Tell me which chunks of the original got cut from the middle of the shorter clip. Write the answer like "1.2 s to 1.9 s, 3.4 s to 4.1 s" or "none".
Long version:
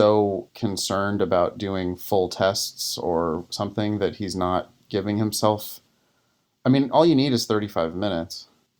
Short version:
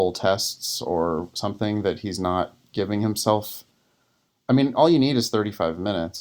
none